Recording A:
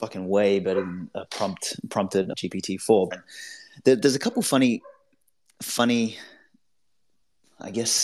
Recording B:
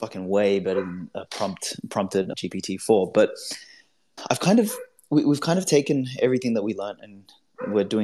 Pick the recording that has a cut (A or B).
A